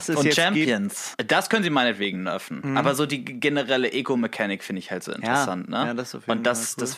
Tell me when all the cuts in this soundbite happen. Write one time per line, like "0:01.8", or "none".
0:01.1